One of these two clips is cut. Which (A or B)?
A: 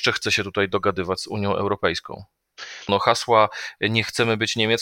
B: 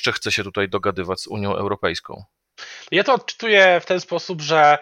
A